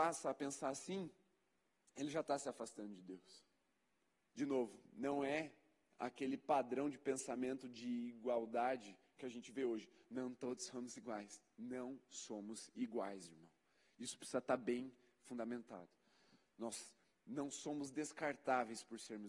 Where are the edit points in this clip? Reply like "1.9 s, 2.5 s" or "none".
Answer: 4.2 s